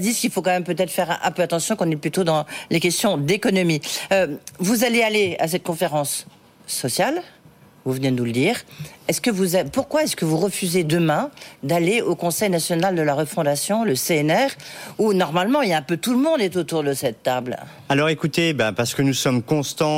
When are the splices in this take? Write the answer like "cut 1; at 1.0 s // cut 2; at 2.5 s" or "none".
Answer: none